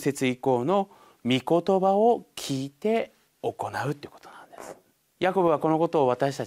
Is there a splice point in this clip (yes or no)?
yes